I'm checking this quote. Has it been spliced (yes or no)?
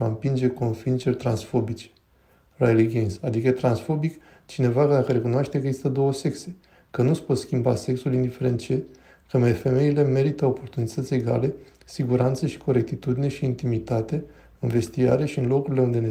no